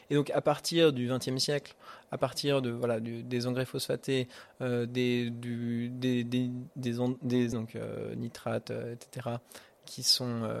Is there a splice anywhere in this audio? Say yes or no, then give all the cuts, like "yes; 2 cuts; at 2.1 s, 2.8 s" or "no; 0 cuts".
yes; 1 cut; at 7.5 s